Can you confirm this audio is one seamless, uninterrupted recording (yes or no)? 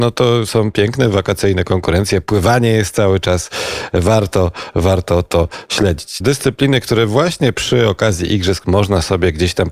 no